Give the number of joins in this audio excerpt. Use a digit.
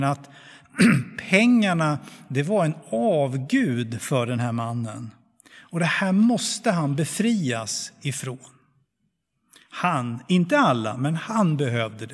0